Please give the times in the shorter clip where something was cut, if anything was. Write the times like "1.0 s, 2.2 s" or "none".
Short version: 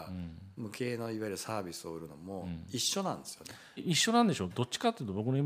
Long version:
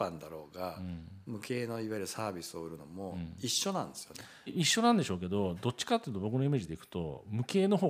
4.5 s